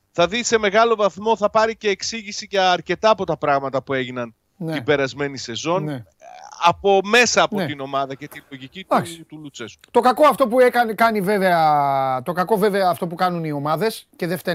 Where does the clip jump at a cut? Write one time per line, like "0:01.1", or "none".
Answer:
none